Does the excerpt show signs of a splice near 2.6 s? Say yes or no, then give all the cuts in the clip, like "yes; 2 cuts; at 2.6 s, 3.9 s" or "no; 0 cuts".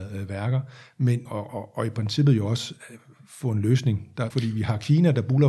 no; 2 cuts; at 1.3 s, 4.3 s